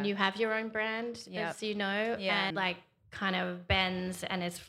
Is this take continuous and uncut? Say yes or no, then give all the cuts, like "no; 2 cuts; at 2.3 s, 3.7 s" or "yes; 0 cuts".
no; 1 cut; at 2.5 s